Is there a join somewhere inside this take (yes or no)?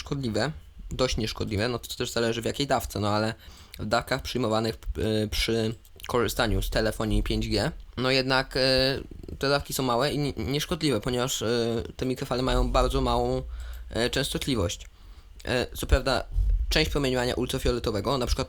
no